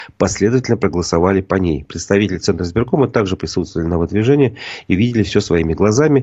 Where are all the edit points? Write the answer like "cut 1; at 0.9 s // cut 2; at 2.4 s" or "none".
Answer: none